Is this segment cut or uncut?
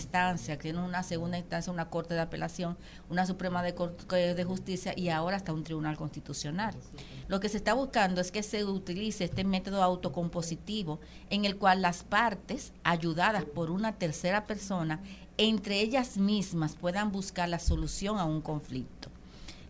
cut